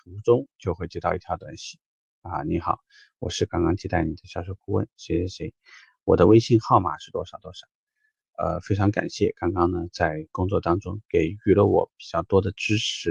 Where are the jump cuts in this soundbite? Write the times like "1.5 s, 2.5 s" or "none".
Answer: none